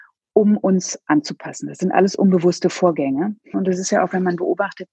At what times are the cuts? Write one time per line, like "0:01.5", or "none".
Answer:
0:03.5